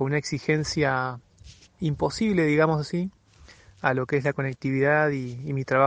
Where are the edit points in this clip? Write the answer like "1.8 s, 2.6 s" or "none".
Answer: none